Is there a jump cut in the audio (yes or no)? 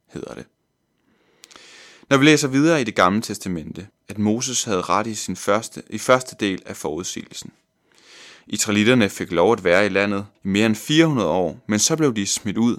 yes